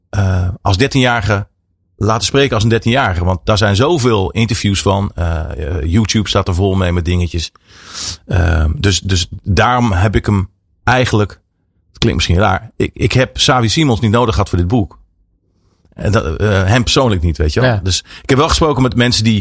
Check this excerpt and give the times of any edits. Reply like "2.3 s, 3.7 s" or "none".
none

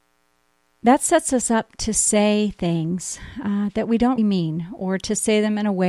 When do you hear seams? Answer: 4.2 s

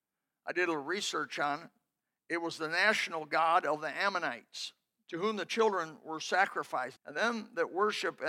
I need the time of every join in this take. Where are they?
5.0 s, 7.0 s

